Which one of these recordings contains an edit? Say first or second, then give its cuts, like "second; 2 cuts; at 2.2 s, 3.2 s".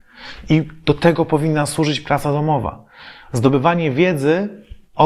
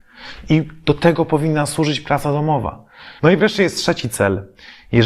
second; 1 cut; at 3.2 s